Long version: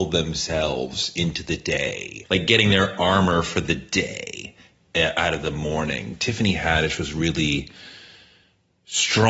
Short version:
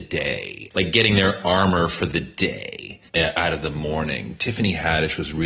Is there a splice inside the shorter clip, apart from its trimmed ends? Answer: yes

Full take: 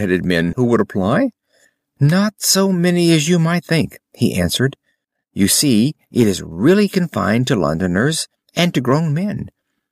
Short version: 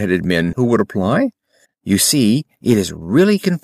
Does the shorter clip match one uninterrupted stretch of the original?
no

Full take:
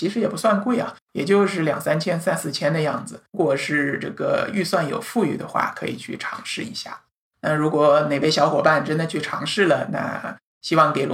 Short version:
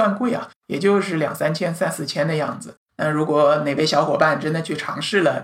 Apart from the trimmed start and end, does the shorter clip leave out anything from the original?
yes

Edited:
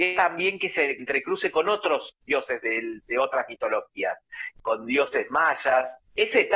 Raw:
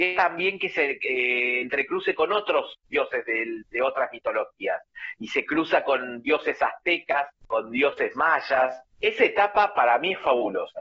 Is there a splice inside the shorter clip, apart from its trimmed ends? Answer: yes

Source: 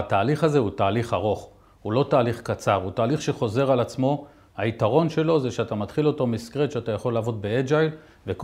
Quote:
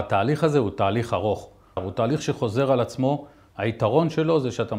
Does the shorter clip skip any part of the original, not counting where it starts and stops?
yes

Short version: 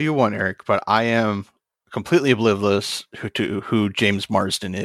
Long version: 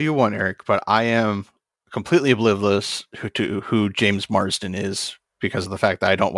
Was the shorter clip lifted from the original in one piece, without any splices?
yes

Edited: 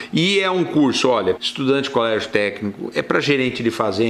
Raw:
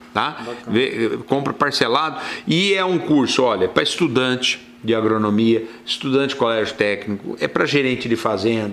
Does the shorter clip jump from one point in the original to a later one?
yes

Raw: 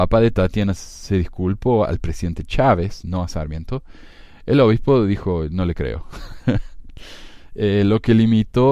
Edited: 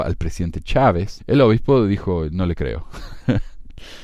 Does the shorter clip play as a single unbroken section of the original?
no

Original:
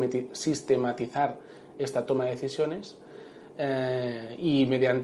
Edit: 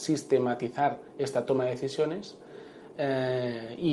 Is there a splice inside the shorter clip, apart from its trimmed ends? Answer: yes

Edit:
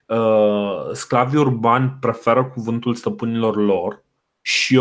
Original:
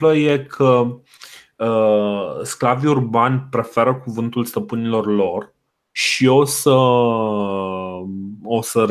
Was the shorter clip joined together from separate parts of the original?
no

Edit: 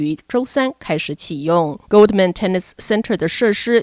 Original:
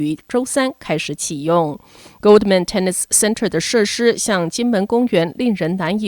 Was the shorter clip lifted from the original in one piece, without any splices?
no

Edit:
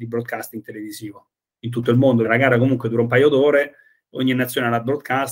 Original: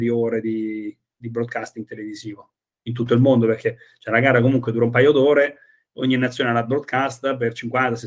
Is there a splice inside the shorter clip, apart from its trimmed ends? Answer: yes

